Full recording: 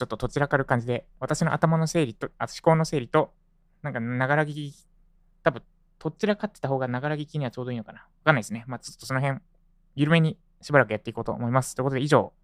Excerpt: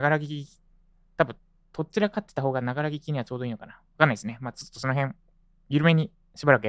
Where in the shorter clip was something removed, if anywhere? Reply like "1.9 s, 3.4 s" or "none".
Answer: none